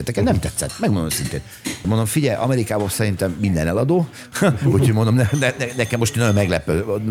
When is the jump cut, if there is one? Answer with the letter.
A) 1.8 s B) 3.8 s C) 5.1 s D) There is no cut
A